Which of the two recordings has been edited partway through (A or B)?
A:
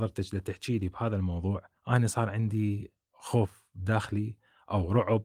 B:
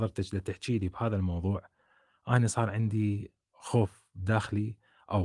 A